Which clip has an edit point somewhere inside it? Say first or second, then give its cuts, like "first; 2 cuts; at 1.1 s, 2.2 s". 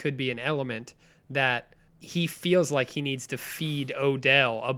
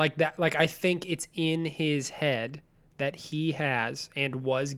first; 1 cut; at 1.9 s